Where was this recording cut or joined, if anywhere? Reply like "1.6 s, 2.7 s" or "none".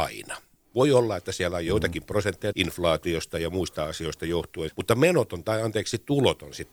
2.5 s, 4.7 s